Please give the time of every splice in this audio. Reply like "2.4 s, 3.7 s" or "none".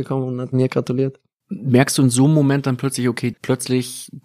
1.4 s, 3.3 s